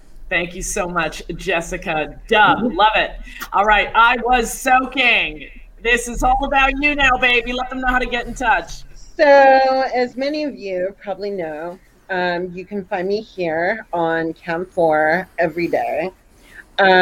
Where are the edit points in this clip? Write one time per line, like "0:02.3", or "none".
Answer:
none